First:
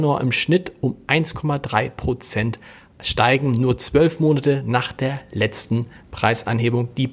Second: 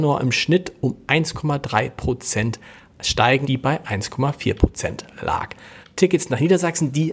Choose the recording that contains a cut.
second; 2 cuts; at 3.4 s, 5.8 s

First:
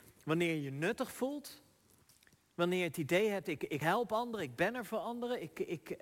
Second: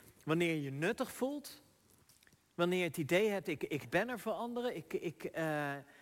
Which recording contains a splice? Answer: second; 1 cut; at 3.8 s

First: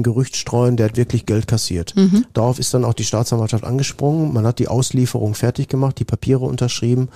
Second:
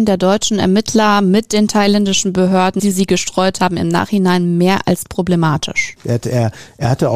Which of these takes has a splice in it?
second; 2 cuts; at 2.8 s, 6.0 s

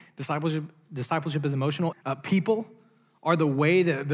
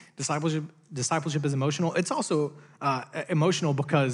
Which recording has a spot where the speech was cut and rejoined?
first; 1 cut; at 1.9 s

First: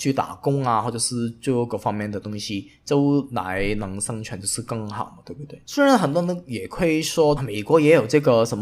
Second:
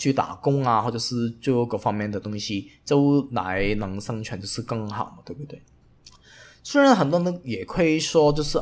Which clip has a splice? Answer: first; 2 cuts; at 5.7 s, 7.4 s

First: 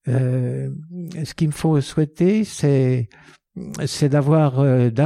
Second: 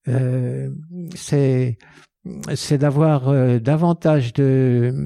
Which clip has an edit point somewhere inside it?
second; 1 cut; at 1.2 s

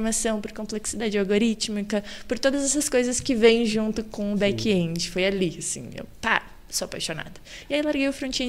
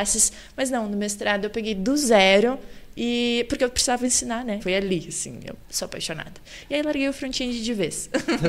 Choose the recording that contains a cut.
second; 2 cuts; at 4.6 s, 5.6 s

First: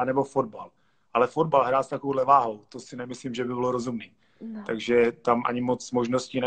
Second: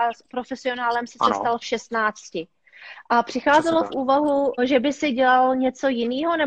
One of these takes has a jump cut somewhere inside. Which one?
second; 1 cut; at 4.6 s

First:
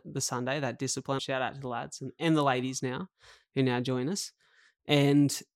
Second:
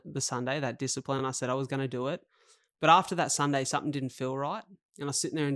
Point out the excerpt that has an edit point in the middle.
first; 1 cut; at 1.2 s

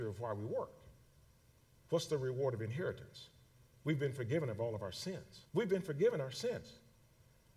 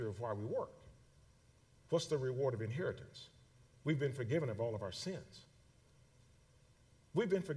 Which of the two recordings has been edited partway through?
first; 1 cut; at 5.5 s

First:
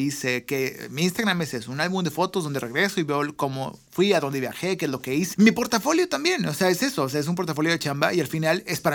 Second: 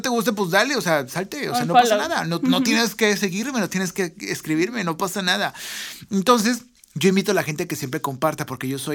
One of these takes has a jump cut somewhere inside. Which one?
first; 1 cut; at 5.3 s

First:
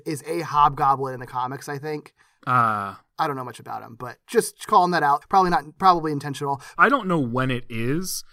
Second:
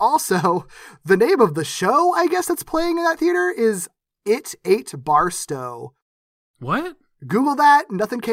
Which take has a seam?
first; 2 cuts; at 5.2 s, 6.8 s

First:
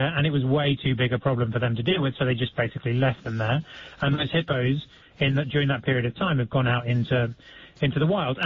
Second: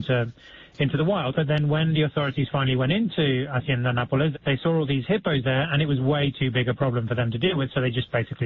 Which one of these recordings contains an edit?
second; 2 cuts; at 1.3 s, 4.3 s

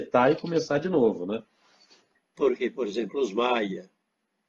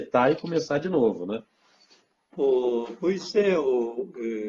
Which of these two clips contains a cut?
first; 1 cut; at 2.2 s

